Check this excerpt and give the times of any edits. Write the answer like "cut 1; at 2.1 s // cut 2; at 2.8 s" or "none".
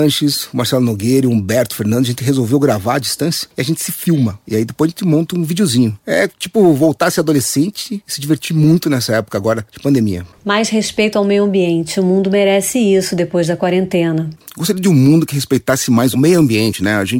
none